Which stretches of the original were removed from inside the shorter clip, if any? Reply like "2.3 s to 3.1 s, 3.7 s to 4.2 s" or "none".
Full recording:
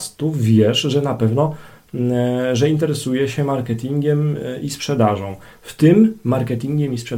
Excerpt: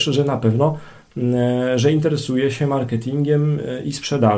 none

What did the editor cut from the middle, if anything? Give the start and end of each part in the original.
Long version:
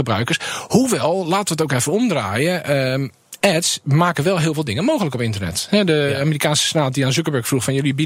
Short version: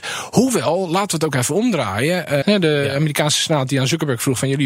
2.8 s to 5.7 s

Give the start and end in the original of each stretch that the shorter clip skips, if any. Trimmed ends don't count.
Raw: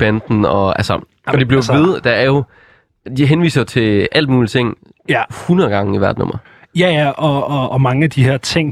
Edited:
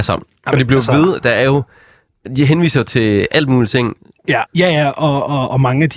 5.3 s to 6.7 s

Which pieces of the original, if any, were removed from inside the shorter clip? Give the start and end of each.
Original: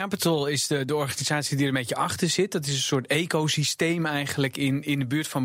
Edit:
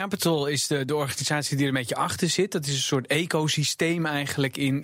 none

